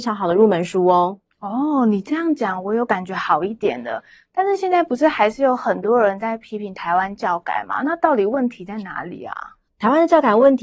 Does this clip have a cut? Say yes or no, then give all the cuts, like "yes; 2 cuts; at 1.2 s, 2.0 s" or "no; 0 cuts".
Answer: no; 0 cuts